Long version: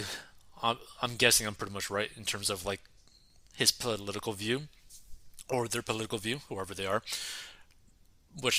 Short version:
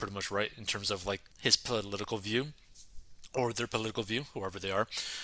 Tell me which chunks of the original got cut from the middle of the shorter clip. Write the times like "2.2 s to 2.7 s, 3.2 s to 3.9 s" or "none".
2.9 s to 3.5 s